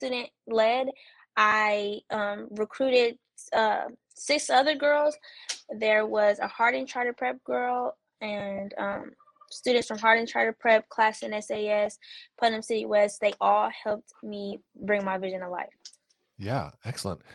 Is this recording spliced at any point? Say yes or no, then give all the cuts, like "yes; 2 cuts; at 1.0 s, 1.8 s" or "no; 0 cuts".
no; 0 cuts